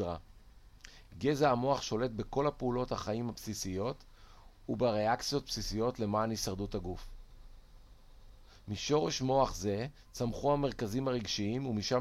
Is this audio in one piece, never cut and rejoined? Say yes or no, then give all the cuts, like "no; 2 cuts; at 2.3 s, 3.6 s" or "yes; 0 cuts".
yes; 0 cuts